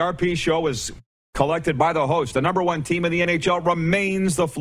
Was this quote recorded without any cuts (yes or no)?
yes